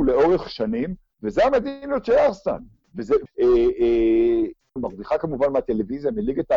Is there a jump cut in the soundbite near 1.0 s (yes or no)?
no